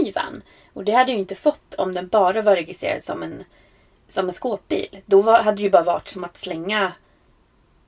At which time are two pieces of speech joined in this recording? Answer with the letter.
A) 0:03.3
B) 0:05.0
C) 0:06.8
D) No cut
D